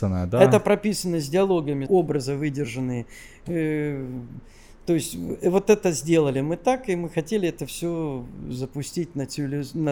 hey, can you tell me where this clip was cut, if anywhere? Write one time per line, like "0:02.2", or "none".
0:01.9